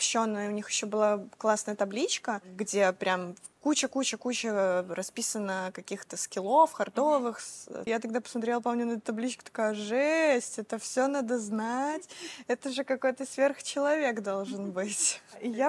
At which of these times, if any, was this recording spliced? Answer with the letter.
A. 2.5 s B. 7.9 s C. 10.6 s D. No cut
B